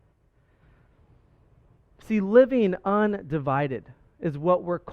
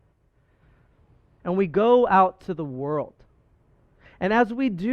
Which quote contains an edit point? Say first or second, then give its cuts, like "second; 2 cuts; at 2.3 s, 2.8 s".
second; 1 cut; at 1.4 s